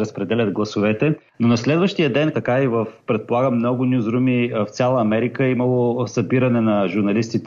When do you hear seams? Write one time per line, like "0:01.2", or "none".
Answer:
0:02.3